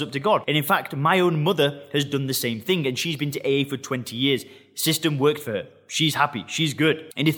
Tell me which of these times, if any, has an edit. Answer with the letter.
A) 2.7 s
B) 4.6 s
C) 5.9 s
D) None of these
D